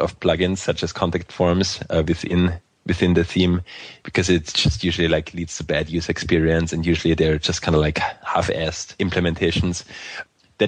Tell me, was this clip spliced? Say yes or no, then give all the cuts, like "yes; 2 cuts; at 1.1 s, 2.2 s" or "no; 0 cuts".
no; 0 cuts